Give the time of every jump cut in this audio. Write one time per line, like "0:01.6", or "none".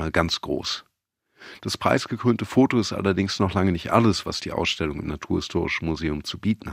none